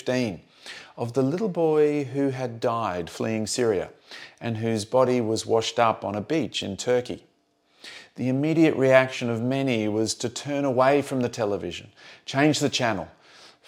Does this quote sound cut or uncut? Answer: uncut